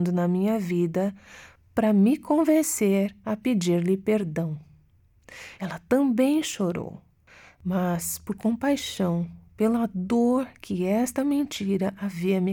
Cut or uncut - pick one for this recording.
cut